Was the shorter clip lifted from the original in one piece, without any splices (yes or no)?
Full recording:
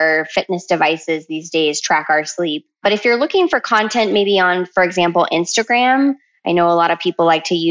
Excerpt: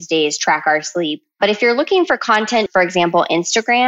no